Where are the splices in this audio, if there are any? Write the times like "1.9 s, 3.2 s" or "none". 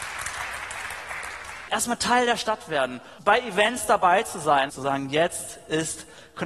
1.7 s, 3.2 s, 4.7 s